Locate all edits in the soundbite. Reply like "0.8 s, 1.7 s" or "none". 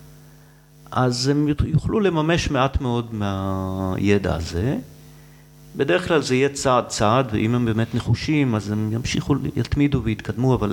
none